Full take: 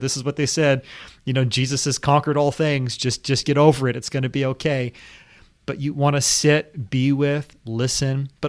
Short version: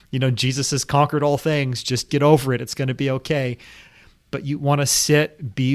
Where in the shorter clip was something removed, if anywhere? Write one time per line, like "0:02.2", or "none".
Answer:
0:02.1